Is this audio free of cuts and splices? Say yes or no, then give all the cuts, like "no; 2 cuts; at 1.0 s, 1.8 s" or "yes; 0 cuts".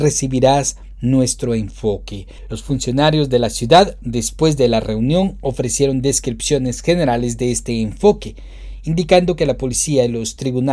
yes; 0 cuts